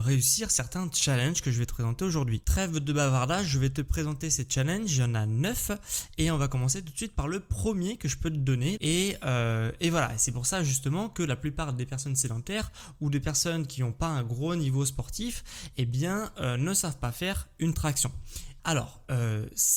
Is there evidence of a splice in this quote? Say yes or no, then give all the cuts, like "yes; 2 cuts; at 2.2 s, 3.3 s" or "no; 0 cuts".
yes; 2 cuts; at 8.8 s, 18.6 s